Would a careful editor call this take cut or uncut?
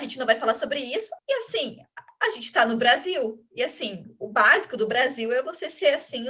cut